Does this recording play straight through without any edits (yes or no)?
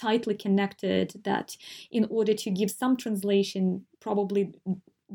no